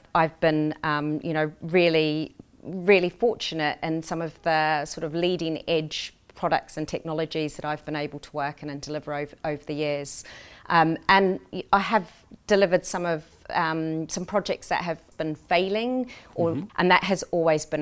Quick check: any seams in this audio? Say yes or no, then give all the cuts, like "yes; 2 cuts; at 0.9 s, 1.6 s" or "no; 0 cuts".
yes; 2 cuts; at 15.1 s, 16.7 s